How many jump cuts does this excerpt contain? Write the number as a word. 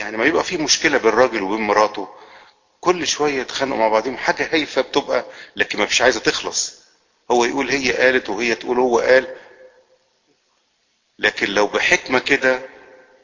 zero